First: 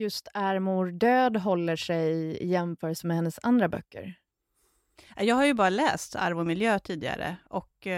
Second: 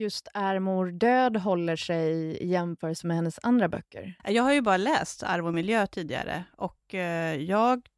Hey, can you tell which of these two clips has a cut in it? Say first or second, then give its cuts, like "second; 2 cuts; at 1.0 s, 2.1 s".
second; 1 cut; at 4.2 s